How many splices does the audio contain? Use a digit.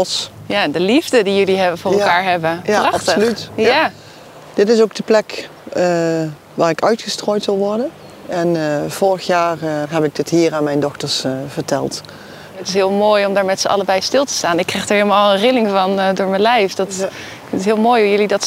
2